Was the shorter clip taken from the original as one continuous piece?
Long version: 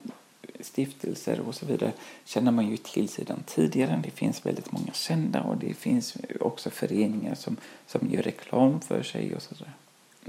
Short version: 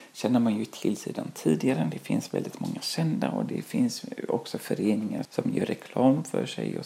no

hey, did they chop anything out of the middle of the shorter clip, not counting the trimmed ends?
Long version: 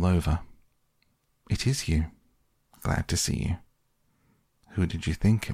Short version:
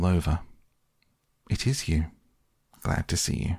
no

